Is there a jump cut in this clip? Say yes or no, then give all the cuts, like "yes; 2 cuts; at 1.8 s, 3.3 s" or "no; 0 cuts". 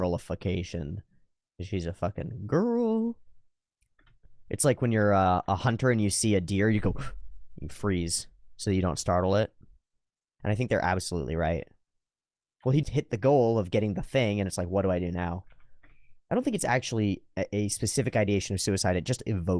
yes; 2 cuts; at 10.4 s, 12.8 s